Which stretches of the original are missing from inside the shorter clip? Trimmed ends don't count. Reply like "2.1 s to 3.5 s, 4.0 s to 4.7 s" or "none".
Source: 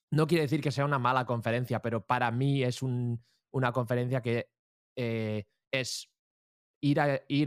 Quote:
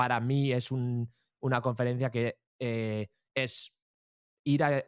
4.6 s to 4.8 s

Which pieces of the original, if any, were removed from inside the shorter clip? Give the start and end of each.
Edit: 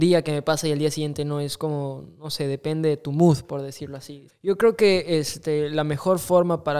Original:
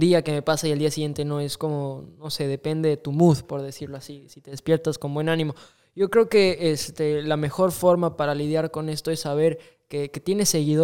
4.3 s to 5.8 s

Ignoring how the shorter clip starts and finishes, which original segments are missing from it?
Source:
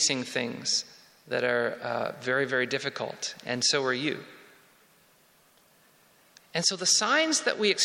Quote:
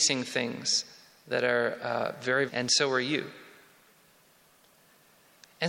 2.5 s to 3.4 s

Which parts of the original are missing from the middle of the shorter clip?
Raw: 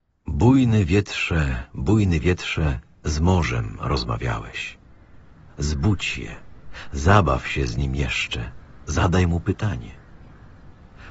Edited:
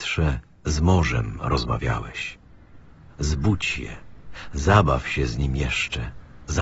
none

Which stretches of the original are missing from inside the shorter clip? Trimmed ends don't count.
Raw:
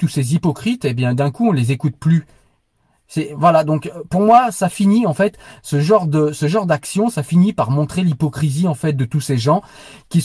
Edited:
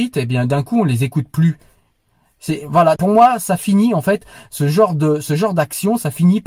3.6 s to 4.1 s

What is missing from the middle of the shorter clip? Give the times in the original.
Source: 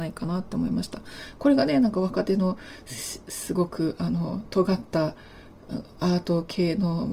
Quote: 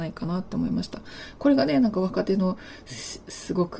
none

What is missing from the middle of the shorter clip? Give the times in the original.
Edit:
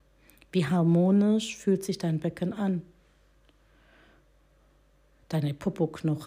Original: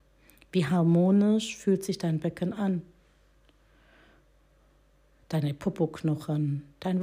none

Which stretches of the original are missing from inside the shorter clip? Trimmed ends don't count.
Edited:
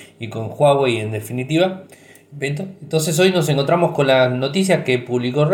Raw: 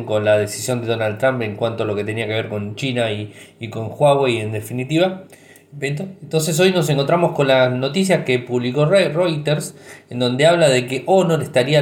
none

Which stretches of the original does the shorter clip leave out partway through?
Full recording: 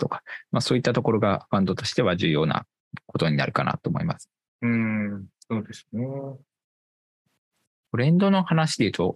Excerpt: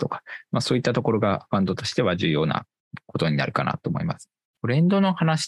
4.4 s to 7.7 s

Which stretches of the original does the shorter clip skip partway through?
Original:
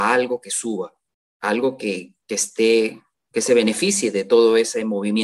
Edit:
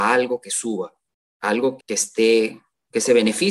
1.8 s to 2.2 s

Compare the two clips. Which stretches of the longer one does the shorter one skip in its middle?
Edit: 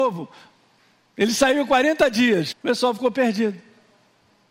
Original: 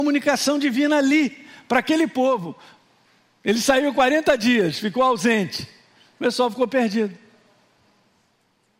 4.8 s to 6.1 s

